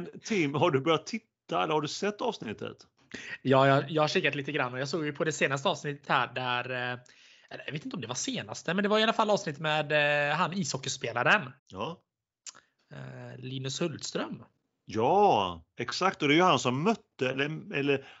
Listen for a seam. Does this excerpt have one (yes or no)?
yes